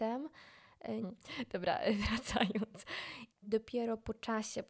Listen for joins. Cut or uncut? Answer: cut